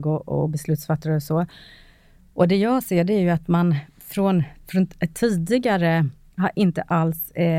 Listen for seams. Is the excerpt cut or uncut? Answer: uncut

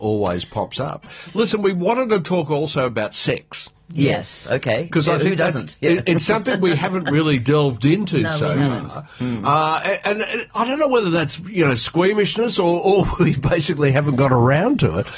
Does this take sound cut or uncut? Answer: uncut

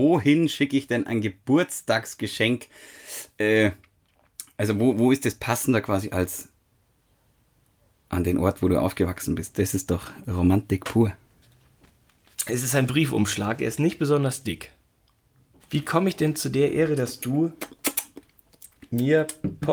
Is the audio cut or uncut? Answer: cut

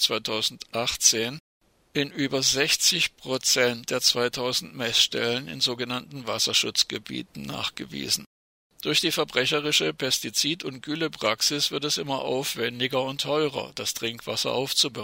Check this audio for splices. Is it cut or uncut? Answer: cut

